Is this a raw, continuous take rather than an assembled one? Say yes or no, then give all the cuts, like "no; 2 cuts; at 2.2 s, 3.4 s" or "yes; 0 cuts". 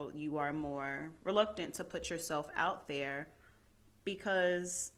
yes; 0 cuts